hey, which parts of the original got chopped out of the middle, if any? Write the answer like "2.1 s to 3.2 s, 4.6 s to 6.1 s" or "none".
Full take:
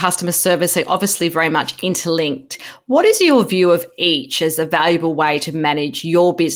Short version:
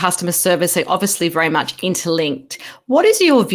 none